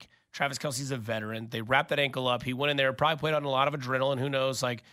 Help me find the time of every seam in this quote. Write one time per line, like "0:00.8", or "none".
none